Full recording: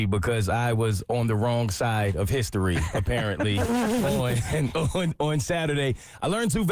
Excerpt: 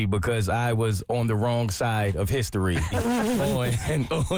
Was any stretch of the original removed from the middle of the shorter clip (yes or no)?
yes